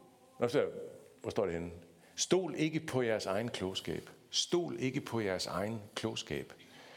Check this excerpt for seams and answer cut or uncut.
uncut